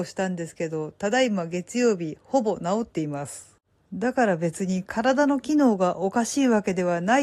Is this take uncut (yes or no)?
yes